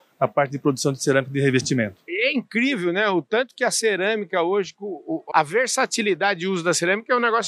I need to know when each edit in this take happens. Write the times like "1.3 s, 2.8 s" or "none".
5.3 s